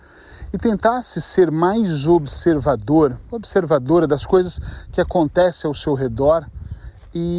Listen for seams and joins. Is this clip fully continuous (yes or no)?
yes